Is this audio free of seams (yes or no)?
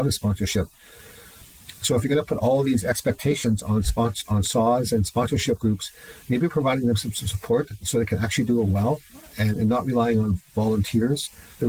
yes